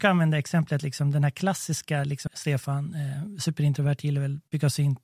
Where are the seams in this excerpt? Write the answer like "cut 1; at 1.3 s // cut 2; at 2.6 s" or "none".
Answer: cut 1; at 2.3 s